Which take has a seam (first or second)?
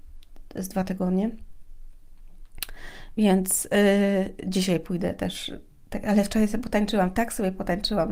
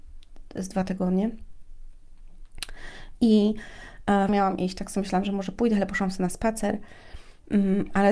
second